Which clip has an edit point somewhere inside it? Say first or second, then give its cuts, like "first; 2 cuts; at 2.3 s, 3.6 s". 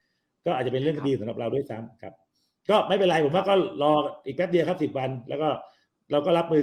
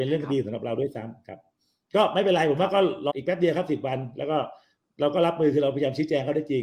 second; 1 cut; at 3.1 s